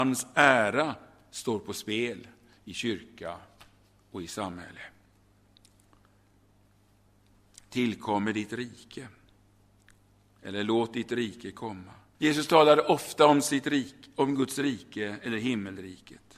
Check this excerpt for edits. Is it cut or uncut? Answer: cut